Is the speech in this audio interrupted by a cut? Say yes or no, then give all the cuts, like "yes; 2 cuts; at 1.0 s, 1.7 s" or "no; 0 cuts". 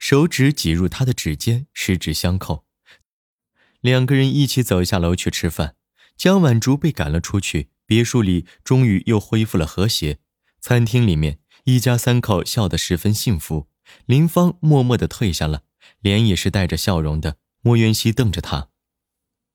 yes; 2 cuts; at 3.0 s, 17.6 s